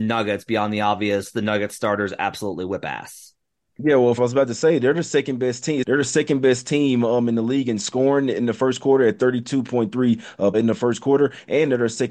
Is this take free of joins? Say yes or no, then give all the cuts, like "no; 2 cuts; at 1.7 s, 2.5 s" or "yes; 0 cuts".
no; 3 cuts; at 4.2 s, 5.8 s, 10.5 s